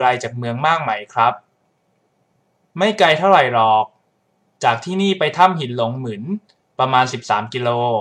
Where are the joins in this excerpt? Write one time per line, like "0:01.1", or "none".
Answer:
none

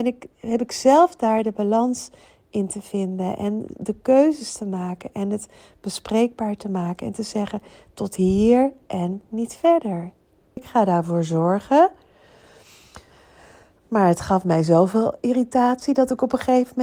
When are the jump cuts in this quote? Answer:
0:10.6

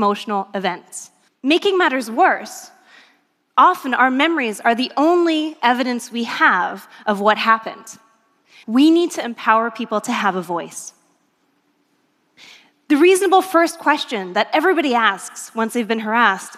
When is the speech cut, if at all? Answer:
0:01.3
0:08.6

